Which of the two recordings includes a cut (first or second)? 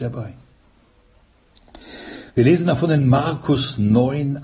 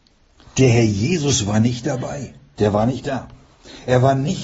second